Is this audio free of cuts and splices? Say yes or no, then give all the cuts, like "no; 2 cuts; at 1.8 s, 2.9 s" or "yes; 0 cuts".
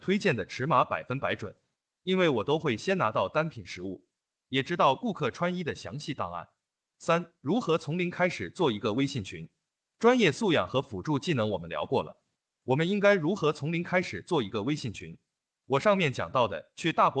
yes; 0 cuts